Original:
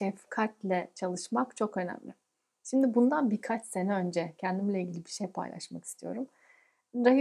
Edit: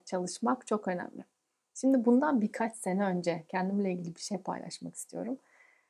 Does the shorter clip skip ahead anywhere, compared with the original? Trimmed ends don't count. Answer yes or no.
no